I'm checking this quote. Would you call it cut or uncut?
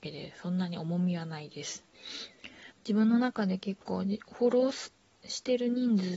cut